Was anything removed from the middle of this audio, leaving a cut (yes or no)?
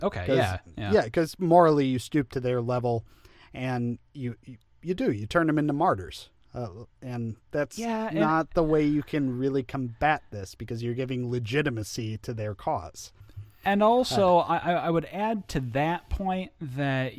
no